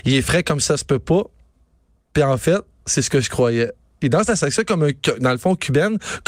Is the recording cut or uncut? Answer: uncut